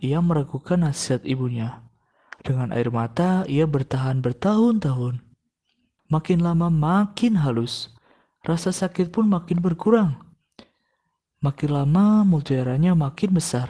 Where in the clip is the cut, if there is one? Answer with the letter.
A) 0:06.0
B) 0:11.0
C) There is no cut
A